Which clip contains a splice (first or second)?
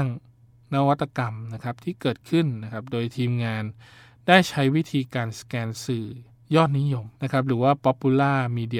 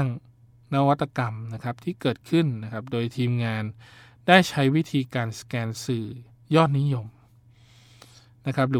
first